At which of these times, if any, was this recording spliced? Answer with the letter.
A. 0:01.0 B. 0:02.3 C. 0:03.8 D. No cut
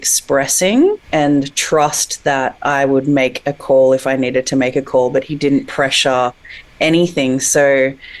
A